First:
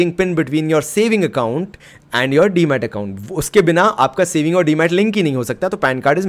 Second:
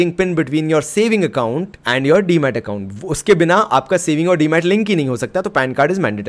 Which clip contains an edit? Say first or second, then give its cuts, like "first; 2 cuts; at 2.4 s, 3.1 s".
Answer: second; 1 cut; at 1.8 s